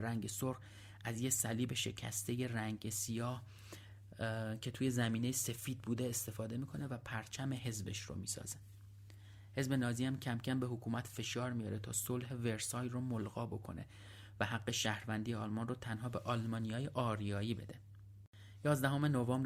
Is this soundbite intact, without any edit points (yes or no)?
yes